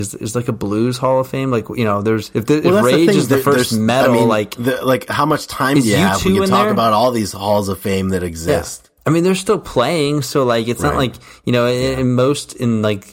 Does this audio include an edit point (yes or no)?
no